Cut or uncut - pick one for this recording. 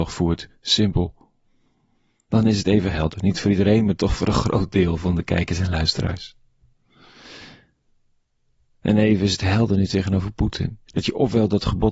cut